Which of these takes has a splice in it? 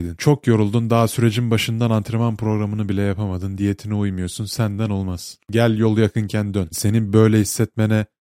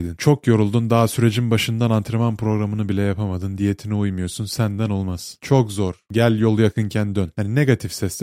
first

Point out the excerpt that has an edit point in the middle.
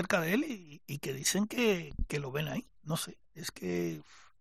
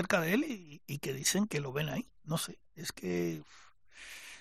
second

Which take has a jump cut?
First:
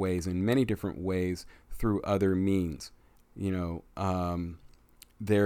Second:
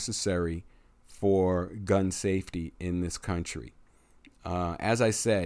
first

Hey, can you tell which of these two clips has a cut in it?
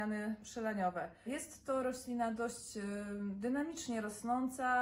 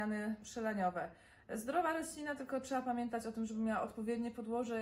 first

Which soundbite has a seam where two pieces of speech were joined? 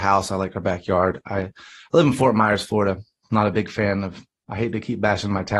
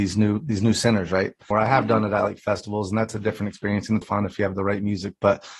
second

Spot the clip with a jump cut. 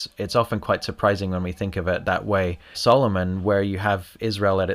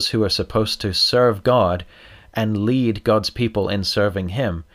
first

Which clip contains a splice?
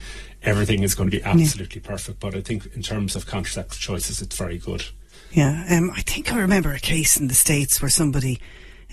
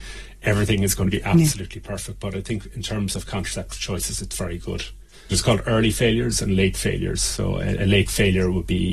second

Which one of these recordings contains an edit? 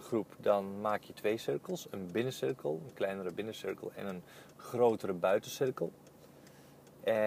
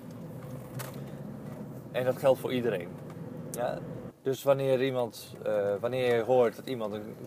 second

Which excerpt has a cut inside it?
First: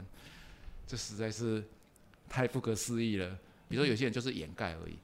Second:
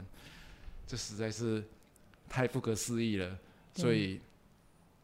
first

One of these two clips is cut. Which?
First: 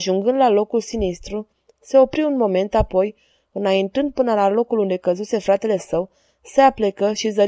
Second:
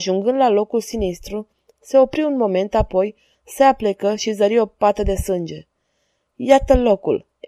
second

